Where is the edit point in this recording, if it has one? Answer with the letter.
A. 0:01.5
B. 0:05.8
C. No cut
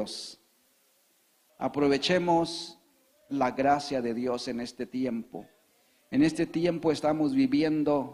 A